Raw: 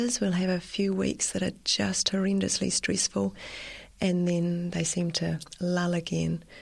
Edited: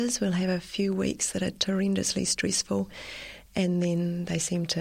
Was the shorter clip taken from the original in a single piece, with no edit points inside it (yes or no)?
no